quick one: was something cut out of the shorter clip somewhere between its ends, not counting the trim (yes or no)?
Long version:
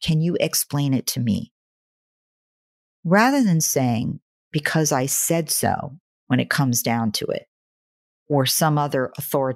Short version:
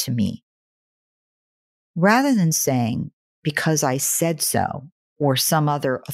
yes